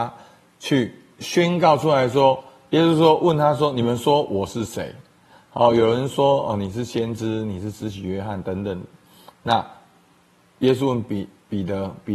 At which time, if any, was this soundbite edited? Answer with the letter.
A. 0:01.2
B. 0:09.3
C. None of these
A